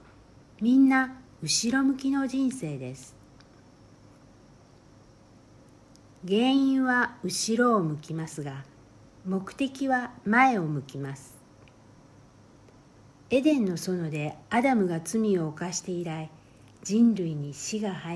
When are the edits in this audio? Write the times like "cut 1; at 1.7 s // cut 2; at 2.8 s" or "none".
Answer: none